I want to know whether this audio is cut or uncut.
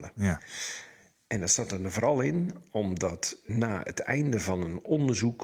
cut